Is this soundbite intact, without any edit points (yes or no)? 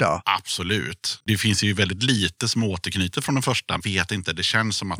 no